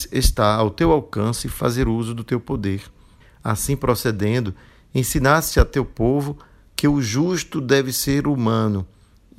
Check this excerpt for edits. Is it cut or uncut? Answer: uncut